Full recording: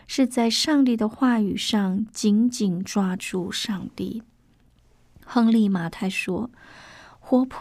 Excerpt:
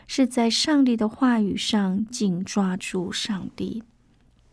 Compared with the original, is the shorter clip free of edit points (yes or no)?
no